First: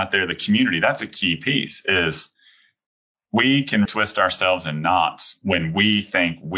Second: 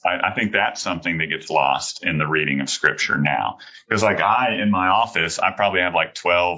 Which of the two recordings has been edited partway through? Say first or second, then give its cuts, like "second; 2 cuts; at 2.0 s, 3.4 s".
first; 1 cut; at 3.8 s